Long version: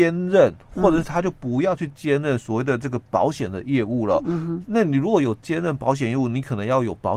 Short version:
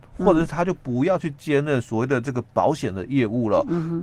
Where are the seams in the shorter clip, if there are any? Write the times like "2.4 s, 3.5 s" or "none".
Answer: none